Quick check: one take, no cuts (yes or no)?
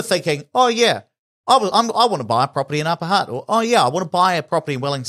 yes